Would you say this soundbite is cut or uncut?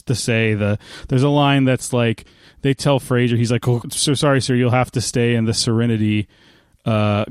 cut